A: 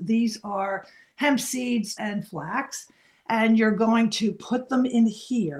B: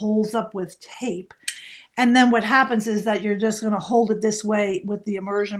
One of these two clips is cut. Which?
A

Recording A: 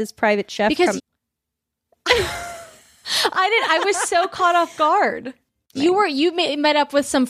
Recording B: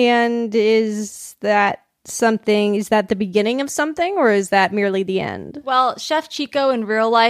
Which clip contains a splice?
A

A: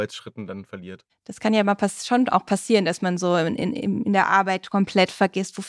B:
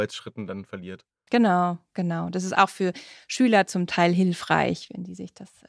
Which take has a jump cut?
A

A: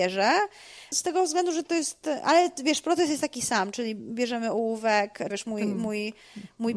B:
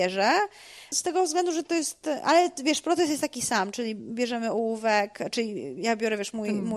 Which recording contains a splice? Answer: A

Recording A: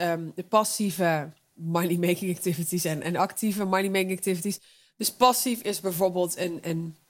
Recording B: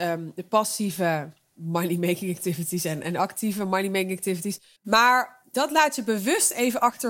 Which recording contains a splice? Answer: B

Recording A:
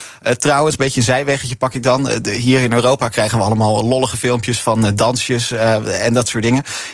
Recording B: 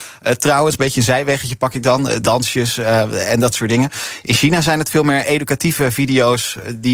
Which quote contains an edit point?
B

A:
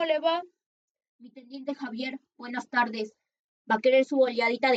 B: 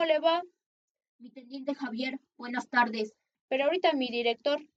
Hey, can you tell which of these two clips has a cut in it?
B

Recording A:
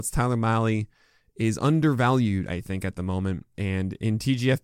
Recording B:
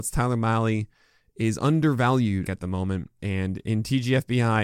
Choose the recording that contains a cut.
B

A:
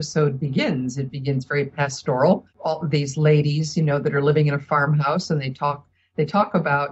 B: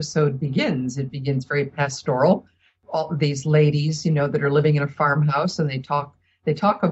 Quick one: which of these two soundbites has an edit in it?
A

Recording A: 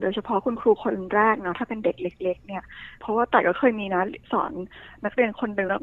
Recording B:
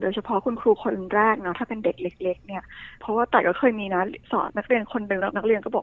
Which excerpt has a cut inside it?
B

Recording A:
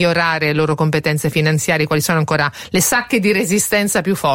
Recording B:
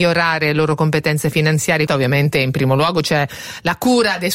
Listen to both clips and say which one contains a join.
B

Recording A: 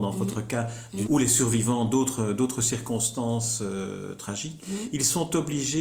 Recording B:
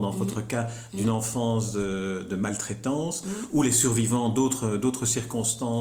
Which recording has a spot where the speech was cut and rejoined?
A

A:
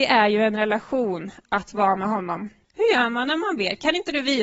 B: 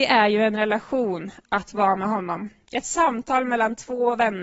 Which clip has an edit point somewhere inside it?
A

